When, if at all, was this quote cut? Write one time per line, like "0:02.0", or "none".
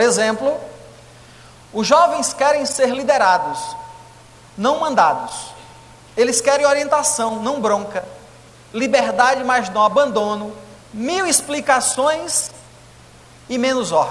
0:10.8